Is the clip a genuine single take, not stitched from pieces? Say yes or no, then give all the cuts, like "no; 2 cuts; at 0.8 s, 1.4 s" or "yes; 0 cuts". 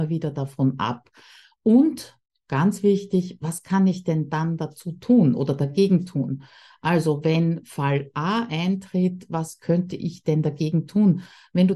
yes; 0 cuts